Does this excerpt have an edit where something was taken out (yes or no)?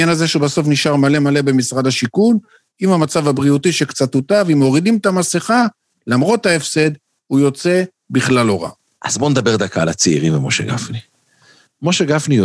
yes